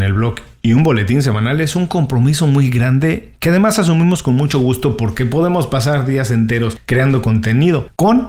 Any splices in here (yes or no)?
no